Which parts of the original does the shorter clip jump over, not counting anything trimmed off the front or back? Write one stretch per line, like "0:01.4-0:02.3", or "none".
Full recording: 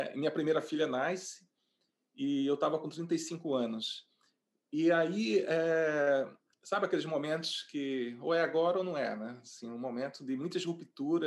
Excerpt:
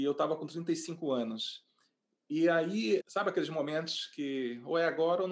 0:05.4-0:06.6